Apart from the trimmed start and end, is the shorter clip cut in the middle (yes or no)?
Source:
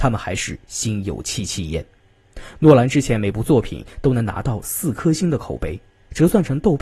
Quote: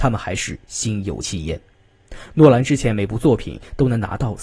yes